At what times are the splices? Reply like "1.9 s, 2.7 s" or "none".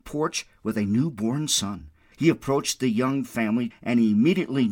2.1 s, 3.7 s